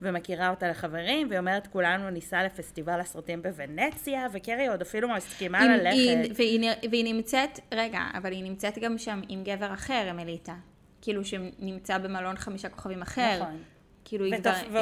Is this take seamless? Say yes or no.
yes